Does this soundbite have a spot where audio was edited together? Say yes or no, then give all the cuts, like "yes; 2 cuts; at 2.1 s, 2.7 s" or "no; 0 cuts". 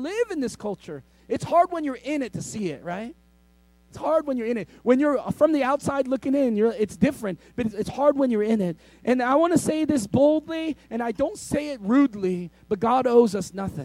no; 0 cuts